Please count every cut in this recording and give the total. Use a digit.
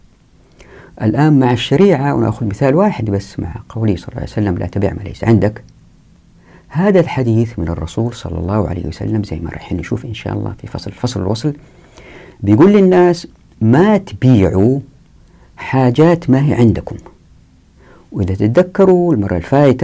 0